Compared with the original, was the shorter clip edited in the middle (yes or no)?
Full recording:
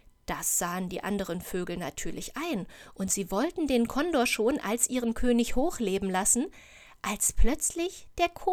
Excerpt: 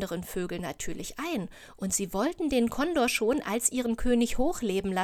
no